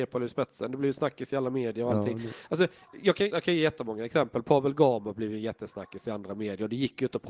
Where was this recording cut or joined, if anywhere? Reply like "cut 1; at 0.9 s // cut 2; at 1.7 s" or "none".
cut 1; at 3.3 s